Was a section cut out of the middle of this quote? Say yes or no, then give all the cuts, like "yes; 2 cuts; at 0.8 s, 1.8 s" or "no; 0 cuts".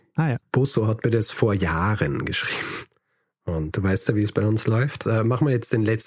yes; 1 cut; at 5.0 s